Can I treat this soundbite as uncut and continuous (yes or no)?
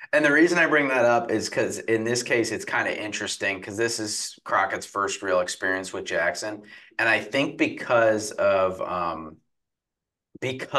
yes